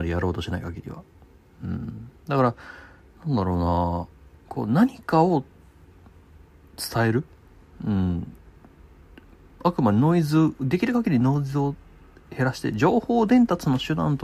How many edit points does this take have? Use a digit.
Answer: 0